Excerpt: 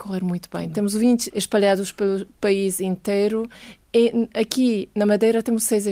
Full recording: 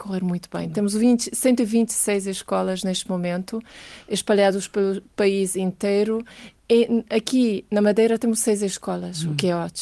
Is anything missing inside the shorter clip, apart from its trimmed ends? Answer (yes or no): yes